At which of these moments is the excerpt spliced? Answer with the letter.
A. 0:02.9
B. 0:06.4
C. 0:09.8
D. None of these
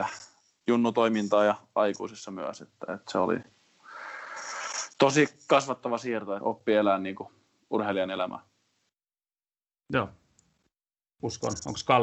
B